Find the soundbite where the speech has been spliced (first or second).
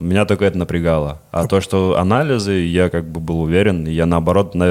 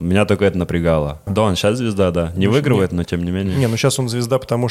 second